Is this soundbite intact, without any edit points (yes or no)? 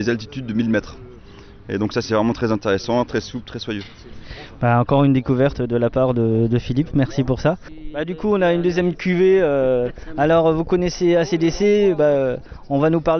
yes